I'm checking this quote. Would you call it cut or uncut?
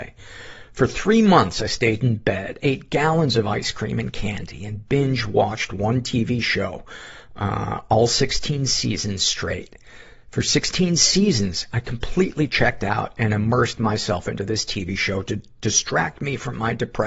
uncut